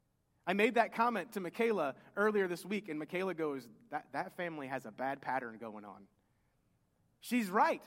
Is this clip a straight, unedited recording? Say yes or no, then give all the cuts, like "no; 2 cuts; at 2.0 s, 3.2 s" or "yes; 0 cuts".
yes; 0 cuts